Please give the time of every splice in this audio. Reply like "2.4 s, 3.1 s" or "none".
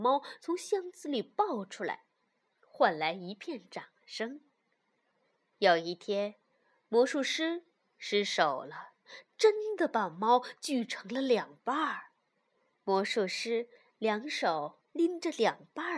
none